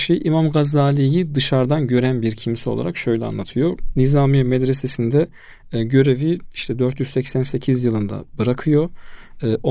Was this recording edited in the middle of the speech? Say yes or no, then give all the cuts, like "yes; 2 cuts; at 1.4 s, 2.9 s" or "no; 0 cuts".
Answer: no; 0 cuts